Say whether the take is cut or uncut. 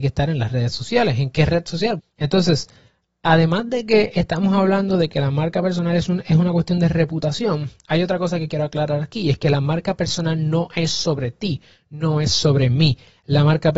cut